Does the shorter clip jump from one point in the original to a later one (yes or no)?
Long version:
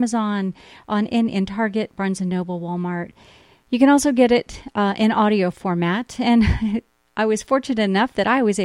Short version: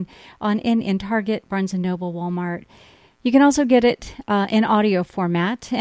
no